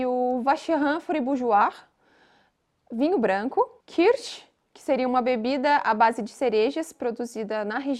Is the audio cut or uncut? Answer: uncut